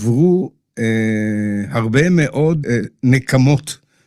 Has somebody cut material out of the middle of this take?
yes; 1 cut; at 2.6 s

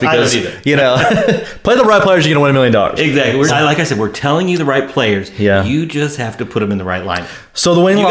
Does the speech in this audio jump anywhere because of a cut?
yes; 1 cut; at 3.5 s

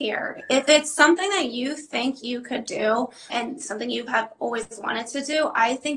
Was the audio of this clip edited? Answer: yes; 1 cut; at 3.3 s

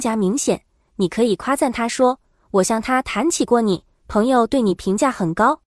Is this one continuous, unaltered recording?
yes; 0 cuts

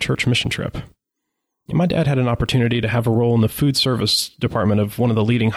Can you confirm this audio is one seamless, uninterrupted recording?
no; 1 cut; at 1.7 s

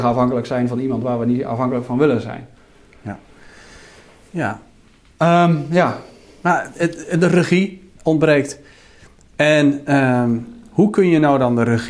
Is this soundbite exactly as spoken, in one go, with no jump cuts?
yes; 0 cuts

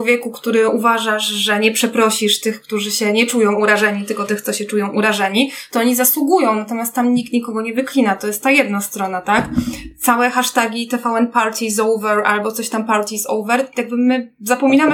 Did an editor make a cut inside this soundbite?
no; 0 cuts

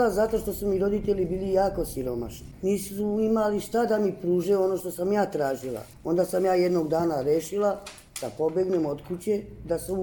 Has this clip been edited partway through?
yes; 1 cut; at 5.9 s

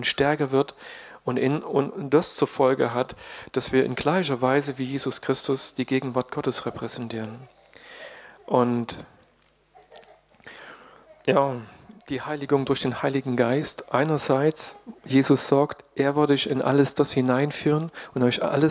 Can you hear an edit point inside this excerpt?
no; 0 cuts

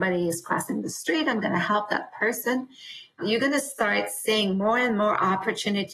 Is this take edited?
yes; 1 cut; at 3.2 s

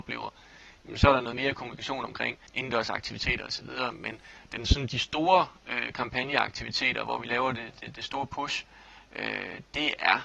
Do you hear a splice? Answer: yes; 1 cut; at 2.5 s

